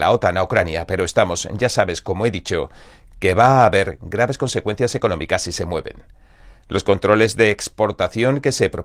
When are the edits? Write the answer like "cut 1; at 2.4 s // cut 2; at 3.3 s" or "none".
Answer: none